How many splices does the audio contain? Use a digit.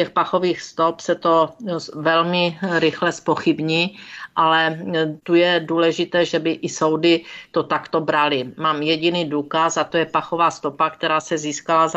1